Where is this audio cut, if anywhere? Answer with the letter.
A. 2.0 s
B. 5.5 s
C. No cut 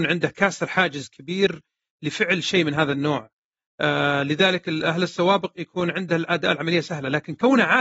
B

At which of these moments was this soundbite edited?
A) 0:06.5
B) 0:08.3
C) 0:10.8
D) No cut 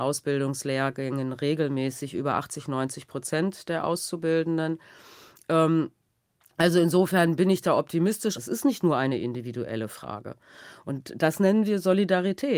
B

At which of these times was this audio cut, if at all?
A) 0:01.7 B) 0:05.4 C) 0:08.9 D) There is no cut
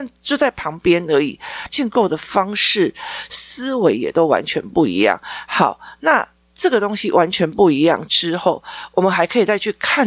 A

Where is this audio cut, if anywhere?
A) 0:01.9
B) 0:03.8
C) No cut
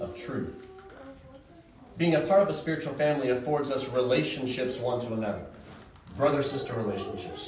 C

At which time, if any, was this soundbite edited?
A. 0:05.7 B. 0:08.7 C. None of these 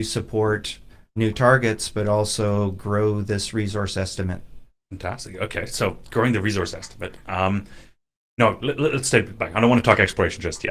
C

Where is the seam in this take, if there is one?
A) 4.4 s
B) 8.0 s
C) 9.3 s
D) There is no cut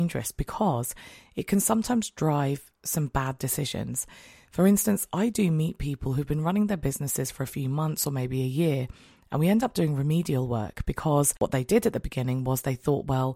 D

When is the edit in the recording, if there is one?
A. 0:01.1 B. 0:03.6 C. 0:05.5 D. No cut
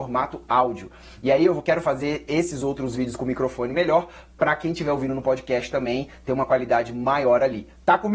D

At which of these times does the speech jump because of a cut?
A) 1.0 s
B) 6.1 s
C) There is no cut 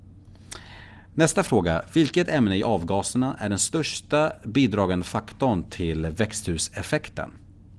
C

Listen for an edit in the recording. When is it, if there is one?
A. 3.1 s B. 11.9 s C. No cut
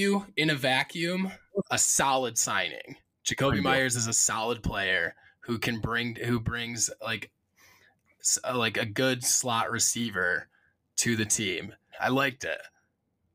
B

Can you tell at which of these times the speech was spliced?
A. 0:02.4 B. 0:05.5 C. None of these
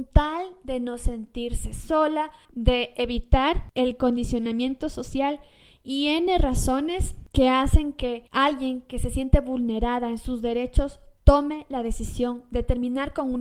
A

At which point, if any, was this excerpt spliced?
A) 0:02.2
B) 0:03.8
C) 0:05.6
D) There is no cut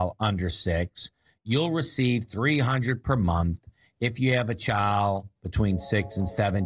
D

